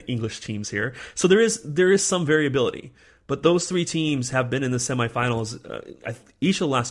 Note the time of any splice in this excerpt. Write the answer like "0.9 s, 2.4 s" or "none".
none